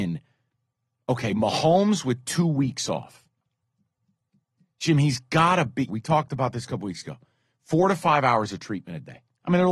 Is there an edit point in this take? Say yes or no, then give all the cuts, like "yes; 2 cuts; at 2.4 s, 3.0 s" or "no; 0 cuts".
yes; 1 cut; at 5.9 s